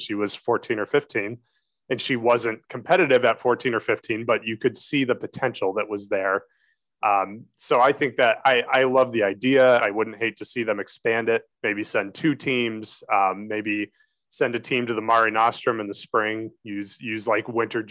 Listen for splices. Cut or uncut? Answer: cut